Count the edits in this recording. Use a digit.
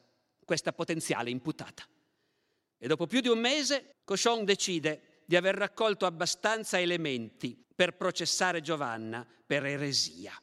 2